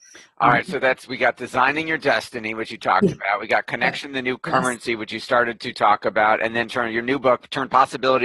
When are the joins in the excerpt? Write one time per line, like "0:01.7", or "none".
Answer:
none